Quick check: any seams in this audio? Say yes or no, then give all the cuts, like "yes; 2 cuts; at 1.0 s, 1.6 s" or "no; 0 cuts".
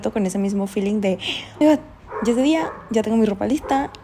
yes; 1 cut; at 1.6 s